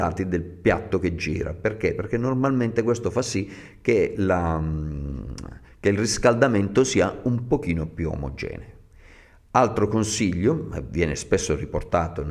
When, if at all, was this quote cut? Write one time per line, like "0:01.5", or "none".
none